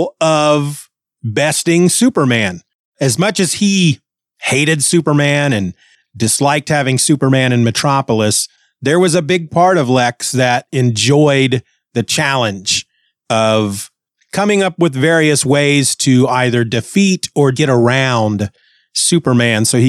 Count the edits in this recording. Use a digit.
1